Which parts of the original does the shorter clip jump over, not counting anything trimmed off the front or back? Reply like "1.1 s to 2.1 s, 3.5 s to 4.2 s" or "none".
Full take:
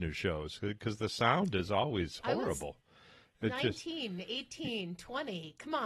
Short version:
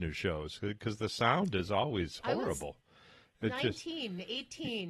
none